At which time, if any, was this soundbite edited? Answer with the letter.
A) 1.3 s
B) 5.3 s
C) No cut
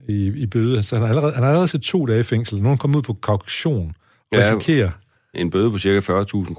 B